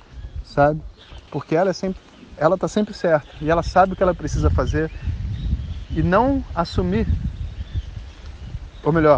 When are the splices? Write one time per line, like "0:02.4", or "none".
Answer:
0:01.3